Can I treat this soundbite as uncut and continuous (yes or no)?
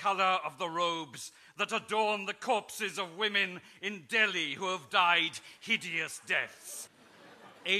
no